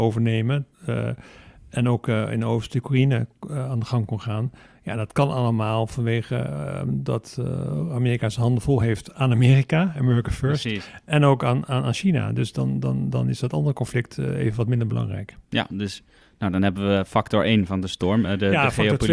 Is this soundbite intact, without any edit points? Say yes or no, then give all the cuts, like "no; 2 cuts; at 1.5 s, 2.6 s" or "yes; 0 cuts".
yes; 0 cuts